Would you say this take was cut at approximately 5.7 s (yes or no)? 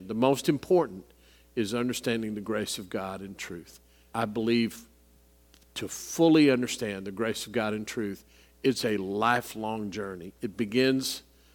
no